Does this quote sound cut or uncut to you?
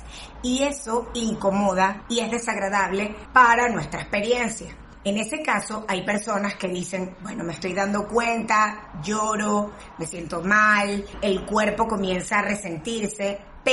uncut